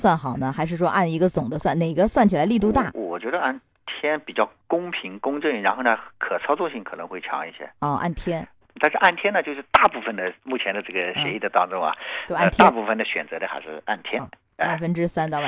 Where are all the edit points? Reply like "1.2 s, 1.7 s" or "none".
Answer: 8.6 s